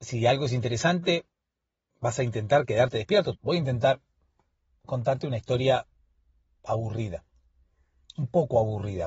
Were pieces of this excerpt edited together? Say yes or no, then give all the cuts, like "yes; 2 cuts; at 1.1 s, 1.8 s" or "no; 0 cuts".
yes; 1 cut; at 3.4 s